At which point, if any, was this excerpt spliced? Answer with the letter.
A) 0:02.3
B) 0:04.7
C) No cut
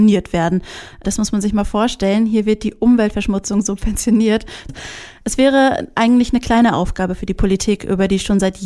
B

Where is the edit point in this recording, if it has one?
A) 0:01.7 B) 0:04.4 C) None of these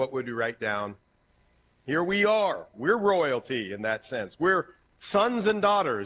A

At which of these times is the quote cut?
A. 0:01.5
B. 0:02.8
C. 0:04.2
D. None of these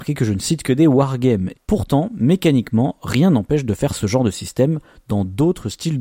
A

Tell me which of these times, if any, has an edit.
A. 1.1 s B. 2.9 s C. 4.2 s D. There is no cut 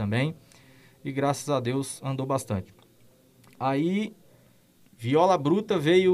D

